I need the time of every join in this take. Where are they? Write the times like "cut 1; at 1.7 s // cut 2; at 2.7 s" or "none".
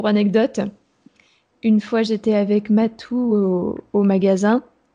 none